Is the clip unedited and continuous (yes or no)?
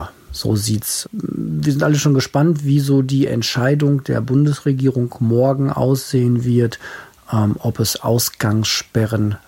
no